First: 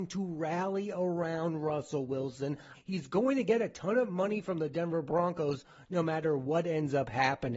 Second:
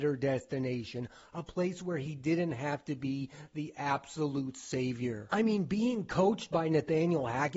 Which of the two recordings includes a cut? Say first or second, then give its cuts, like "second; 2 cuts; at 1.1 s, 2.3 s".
first; 1 cut; at 2.7 s